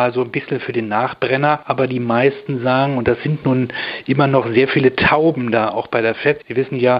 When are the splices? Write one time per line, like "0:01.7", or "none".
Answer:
none